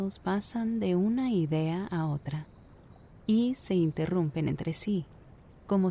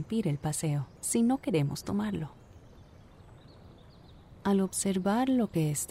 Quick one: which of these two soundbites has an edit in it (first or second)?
second